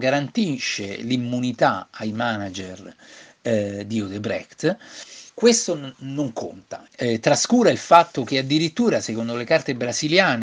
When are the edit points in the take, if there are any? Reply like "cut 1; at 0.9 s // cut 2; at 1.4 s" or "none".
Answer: cut 1; at 5.3 s // cut 2; at 6.9 s